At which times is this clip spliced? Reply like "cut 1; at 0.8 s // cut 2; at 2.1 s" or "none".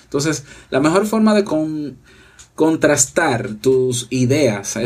cut 1; at 1.4 s